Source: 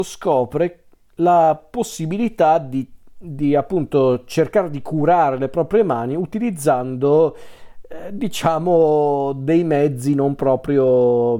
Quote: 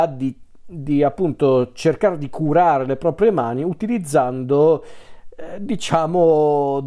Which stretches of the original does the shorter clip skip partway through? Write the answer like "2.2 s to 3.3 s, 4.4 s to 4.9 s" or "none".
none